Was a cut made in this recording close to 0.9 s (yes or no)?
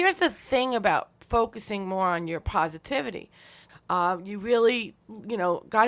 no